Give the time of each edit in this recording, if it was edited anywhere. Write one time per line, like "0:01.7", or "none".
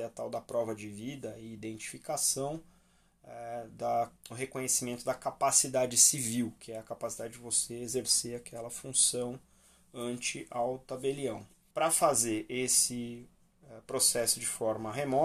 0:04.2
0:11.7